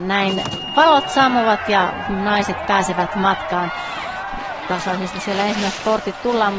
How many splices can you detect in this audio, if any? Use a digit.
0